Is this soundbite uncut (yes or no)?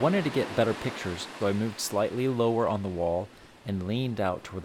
no